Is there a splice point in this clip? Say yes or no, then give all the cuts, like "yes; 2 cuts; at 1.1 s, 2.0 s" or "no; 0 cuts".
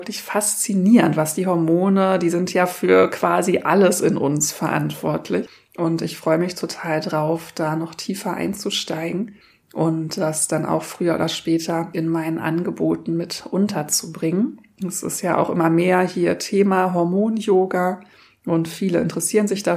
no; 0 cuts